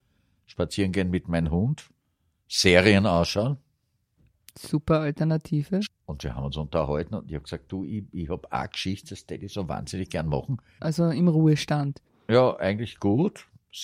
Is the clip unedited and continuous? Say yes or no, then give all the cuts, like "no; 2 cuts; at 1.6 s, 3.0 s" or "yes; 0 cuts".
no; 2 cuts; at 5.9 s, 10.8 s